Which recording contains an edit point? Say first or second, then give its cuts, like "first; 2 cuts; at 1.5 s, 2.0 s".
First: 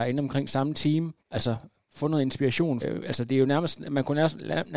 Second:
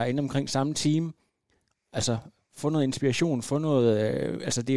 first; 2 cuts; at 1.2 s, 2.8 s